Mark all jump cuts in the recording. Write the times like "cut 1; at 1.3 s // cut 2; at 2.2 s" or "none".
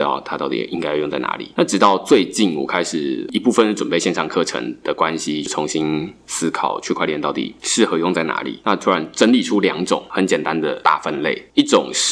none